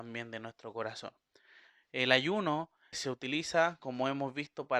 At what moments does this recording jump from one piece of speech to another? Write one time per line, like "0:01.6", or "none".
0:02.9